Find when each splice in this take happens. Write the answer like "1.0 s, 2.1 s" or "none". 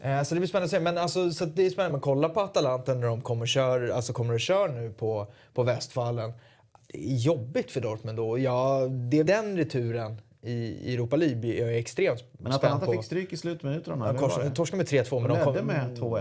1.9 s, 9.3 s